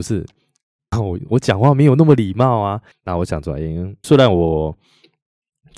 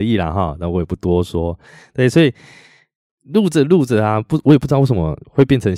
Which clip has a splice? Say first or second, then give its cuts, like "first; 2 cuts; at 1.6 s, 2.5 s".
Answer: first; 3 cuts; at 0.9 s, 2.9 s, 4.0 s